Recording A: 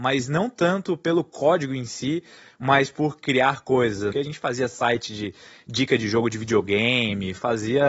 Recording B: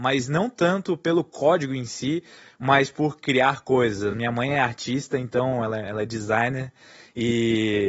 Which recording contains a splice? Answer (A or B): A